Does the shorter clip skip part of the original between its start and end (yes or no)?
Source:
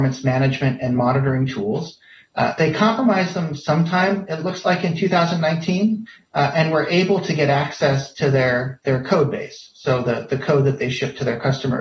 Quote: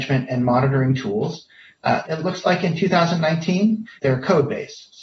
yes